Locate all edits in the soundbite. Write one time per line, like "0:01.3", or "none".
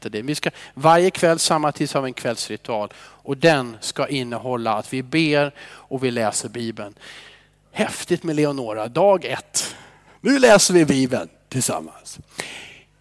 none